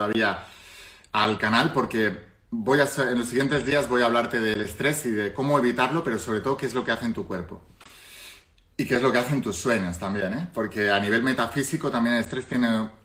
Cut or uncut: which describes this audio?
uncut